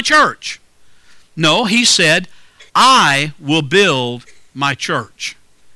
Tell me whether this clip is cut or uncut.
cut